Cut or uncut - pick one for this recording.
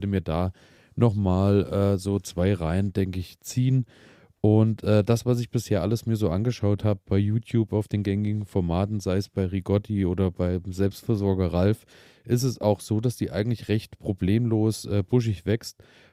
uncut